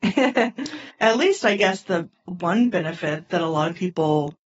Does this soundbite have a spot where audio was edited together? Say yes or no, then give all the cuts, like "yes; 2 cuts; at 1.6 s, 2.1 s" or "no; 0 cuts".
no; 0 cuts